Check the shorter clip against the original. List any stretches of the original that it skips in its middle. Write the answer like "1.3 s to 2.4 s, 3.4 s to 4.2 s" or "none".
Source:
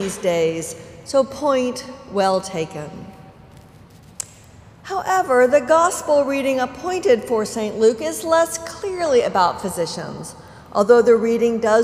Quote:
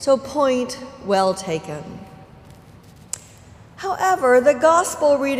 none